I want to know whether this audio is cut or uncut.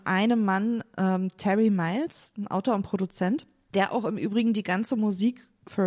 uncut